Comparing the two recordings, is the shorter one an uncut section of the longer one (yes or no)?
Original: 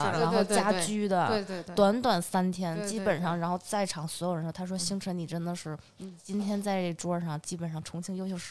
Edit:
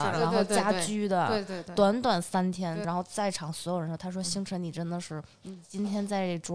no